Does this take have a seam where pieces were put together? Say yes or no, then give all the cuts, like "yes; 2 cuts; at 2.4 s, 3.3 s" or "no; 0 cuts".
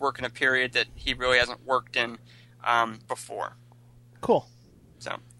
yes; 1 cut; at 3.0 s